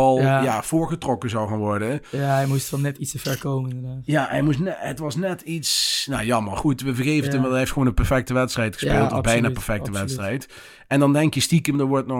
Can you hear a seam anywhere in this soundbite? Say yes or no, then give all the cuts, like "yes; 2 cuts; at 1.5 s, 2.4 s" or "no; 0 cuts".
no; 0 cuts